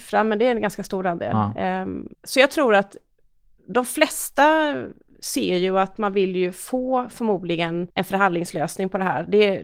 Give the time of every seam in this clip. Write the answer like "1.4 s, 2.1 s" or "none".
2.1 s